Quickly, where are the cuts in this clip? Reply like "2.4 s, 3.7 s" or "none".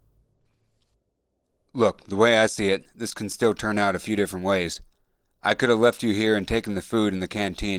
none